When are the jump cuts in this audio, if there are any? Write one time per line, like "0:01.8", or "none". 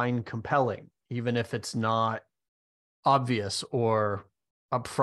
none

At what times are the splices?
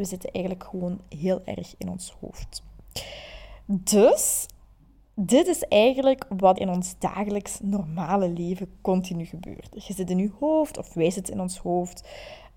0:06.6

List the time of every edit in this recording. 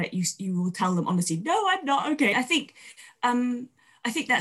0:02.3

